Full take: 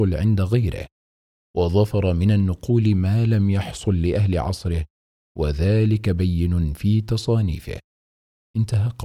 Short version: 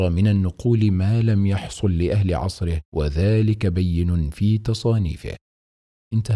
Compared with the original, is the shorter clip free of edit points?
no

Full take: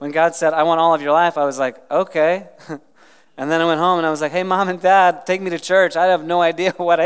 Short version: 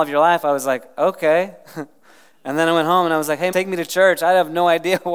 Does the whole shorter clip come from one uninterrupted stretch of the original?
no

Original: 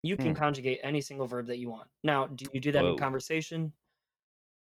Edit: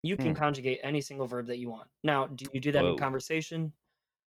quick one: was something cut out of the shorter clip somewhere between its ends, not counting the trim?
no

